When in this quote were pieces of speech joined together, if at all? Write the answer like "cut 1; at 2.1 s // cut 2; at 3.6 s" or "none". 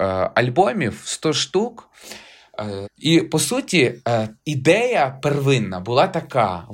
cut 1; at 2.8 s // cut 2; at 4.4 s